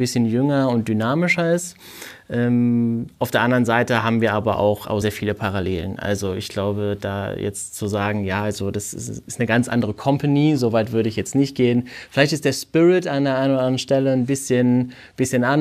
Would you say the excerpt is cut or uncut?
cut